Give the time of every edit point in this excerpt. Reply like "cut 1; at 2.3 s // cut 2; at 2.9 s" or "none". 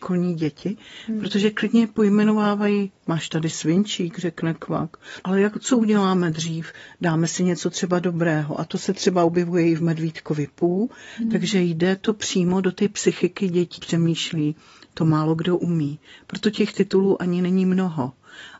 cut 1; at 5.2 s // cut 2; at 13.8 s